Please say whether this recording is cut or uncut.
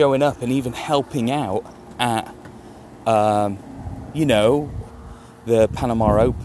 uncut